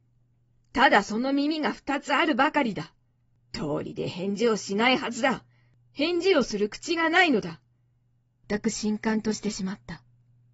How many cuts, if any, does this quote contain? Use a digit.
1